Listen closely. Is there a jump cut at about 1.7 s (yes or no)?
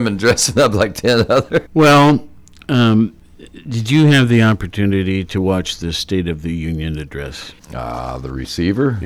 yes